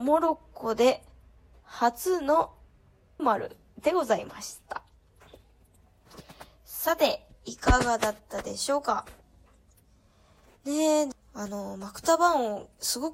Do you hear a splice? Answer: yes; 2 cuts; at 3.2 s, 11.1 s

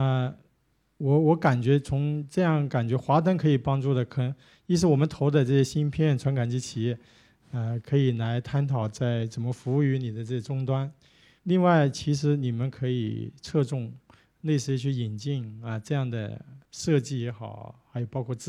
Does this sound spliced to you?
yes; 1 cut; at 11.4 s

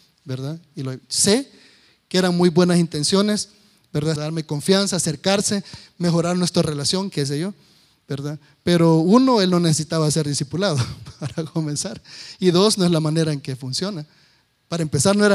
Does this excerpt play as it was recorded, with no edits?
no; 1 cut; at 4.2 s

